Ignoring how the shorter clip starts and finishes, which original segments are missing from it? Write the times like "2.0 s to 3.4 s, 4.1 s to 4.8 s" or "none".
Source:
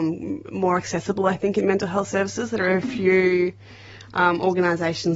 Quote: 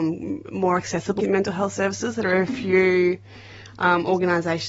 1.2 s to 1.5 s

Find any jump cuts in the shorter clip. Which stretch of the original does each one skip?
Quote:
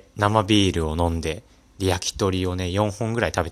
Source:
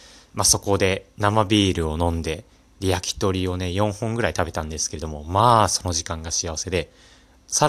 none

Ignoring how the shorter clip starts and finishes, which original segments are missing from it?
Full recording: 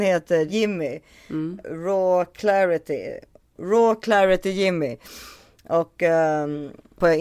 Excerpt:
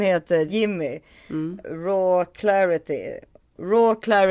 none

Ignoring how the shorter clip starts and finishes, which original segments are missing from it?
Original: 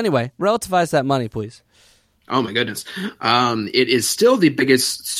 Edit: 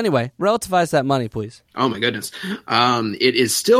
1.7 s to 2.2 s

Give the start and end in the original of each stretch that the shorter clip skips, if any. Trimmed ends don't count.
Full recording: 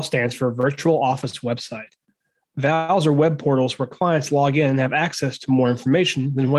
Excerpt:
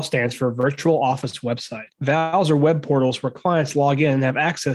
1.9 s to 2.5 s

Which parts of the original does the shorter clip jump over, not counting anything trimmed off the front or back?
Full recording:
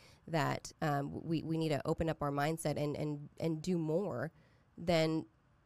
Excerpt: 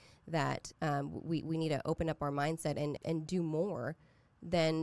3.0 s to 3.3 s

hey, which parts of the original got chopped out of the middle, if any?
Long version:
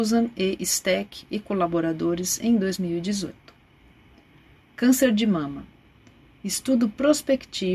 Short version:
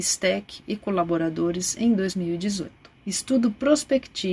3.6 s to 6.3 s

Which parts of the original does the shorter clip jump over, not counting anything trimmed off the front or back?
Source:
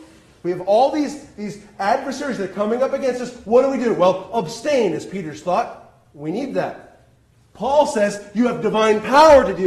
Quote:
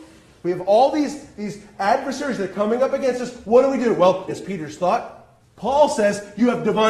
4.3 s to 4.9 s, 6.0 s to 7.4 s

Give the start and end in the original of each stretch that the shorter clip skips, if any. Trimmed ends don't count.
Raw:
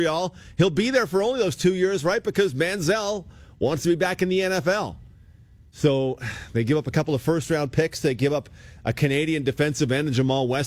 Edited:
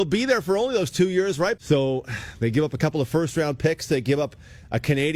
2.2 s to 5.7 s

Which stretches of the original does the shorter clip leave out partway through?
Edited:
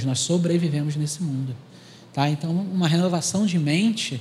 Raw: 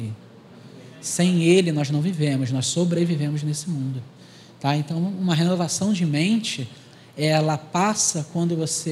none

